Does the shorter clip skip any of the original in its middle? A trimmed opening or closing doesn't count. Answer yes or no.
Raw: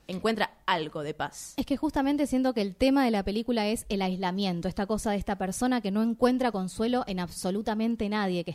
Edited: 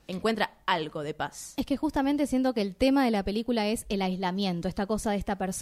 no